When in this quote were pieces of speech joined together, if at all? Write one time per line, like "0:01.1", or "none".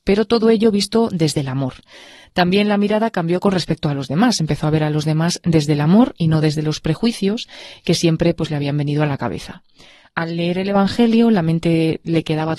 none